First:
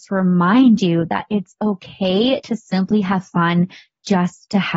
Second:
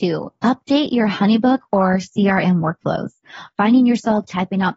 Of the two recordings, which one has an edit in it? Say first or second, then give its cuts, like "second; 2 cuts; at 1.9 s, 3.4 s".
second; 1 cut; at 3.5 s